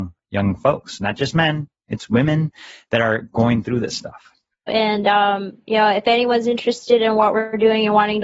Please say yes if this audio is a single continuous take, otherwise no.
no